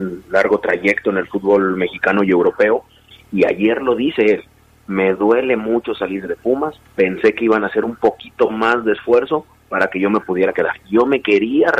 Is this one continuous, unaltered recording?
no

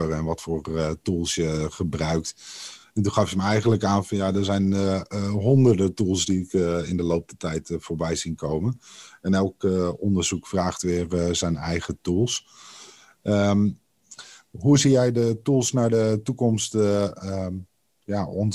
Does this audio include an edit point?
no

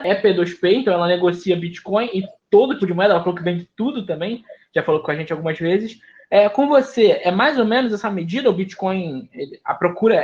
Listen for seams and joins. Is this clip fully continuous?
no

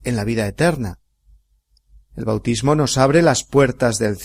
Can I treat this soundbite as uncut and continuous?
yes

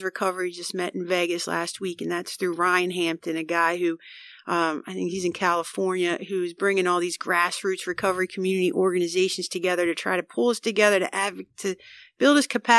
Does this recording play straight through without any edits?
yes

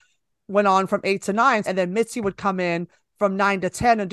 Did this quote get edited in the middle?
yes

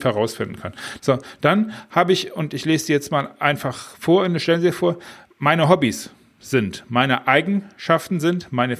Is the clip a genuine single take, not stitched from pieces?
no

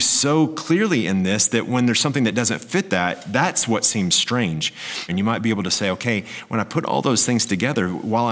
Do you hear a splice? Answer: yes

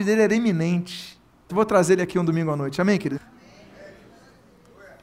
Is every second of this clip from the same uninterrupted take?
no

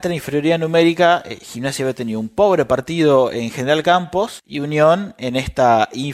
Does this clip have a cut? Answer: no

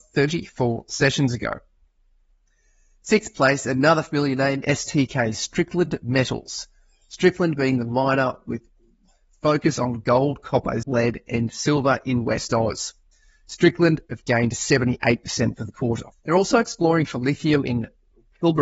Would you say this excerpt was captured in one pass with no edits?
no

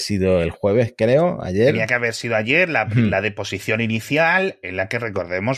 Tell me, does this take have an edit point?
no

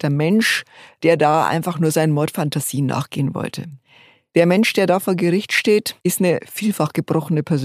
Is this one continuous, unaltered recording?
yes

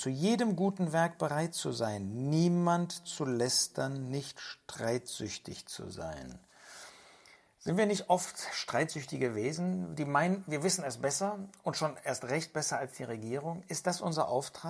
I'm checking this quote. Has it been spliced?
no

